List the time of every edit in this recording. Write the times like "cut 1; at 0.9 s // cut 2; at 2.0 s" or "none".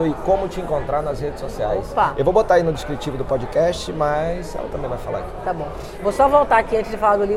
none

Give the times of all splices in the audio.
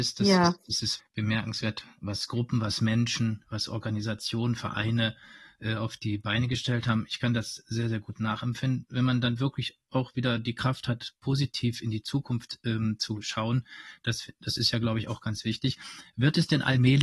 cut 1; at 1.0 s

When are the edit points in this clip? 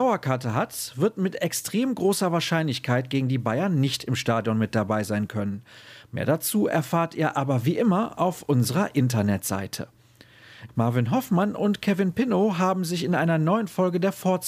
cut 1; at 10.7 s

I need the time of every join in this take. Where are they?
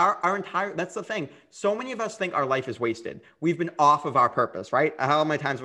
none

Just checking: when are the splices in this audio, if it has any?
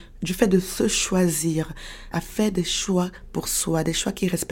cut 1; at 2.1 s

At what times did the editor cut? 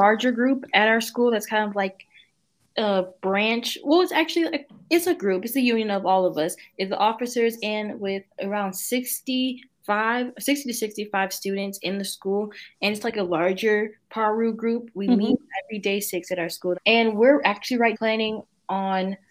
cut 1; at 16.7 s // cut 2; at 17.9 s

